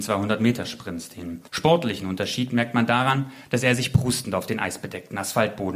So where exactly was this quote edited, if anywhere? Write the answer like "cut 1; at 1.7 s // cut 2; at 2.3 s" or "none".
cut 1; at 1.5 s